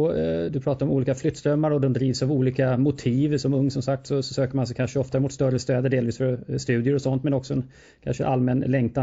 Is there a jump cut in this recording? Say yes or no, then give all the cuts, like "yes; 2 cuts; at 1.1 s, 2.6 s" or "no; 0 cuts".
no; 0 cuts